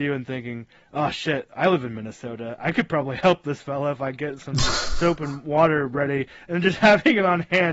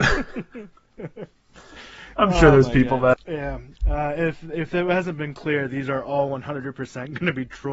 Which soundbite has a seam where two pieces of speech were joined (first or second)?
second